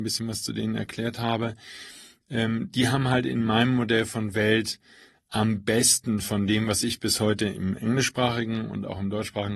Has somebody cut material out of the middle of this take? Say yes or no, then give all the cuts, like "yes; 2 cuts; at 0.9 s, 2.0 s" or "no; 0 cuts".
no; 0 cuts